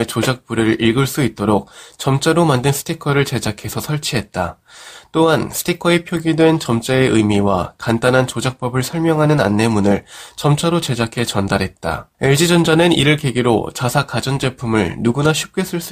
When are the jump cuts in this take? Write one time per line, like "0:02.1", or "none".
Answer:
0:12.1